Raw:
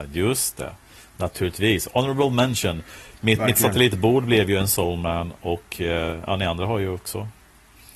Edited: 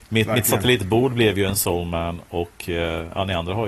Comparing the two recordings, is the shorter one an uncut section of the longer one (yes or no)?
yes